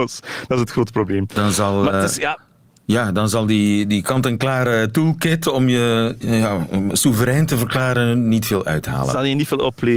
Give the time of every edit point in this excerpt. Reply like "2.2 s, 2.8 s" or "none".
none